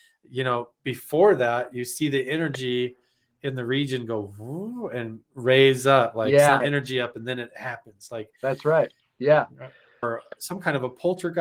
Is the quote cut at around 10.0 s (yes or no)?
yes